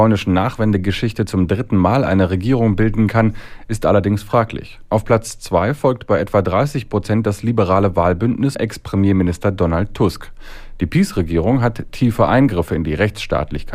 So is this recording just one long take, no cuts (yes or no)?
no